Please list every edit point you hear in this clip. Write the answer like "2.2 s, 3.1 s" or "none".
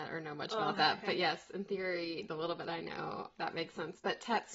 none